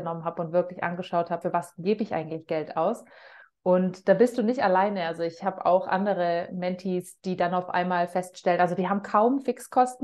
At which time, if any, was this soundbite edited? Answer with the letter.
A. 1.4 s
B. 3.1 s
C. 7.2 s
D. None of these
A